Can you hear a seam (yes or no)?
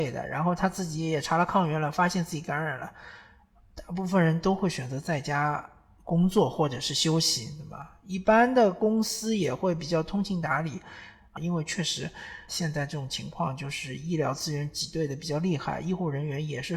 yes